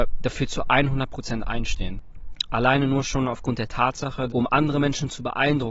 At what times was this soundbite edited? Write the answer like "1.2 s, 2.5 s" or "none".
2.5 s, 4.3 s